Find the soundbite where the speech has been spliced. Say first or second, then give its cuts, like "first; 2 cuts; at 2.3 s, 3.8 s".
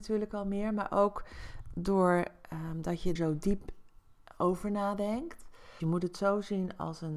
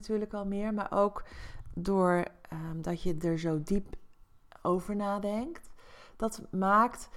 first; 2 cuts; at 3.2 s, 5.8 s